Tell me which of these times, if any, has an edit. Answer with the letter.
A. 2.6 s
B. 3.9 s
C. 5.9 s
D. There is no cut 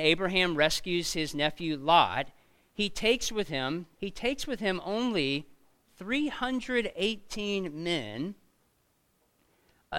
B